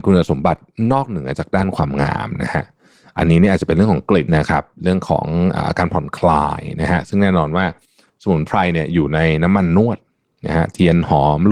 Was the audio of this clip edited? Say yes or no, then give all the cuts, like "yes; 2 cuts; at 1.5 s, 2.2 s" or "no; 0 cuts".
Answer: yes; 1 cut; at 4.3 s